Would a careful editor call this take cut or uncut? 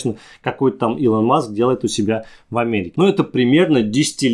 cut